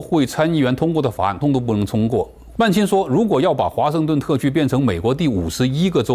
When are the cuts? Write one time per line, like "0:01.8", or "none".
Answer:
0:01.4
0:02.5